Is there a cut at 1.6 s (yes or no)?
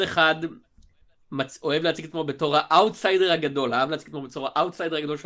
no